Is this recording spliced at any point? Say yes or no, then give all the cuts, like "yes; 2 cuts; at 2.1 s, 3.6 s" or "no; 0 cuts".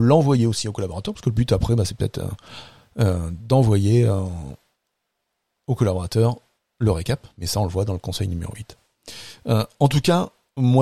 no; 0 cuts